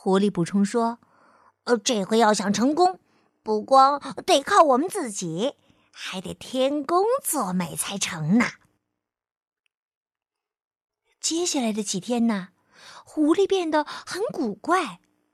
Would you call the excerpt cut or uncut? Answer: uncut